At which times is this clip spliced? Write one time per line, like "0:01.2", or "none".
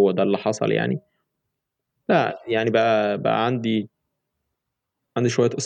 none